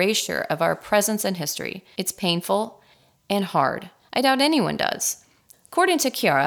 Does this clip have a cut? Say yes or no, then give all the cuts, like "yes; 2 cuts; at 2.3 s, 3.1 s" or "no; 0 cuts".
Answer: yes; 3 cuts; at 1.9 s, 4.0 s, 5.5 s